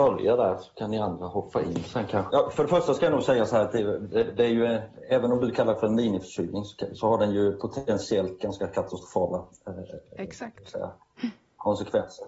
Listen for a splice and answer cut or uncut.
cut